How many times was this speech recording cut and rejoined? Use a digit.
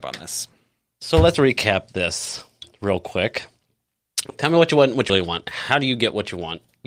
1